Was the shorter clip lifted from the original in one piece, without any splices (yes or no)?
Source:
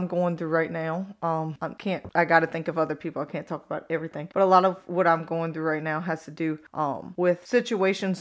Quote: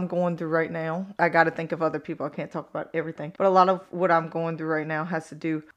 no